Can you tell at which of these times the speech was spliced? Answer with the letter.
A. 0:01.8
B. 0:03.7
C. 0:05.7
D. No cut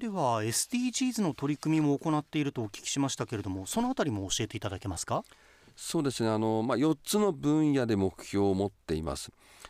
D